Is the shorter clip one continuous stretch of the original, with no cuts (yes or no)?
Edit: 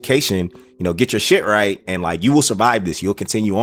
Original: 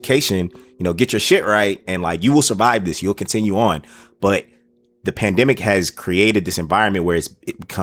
yes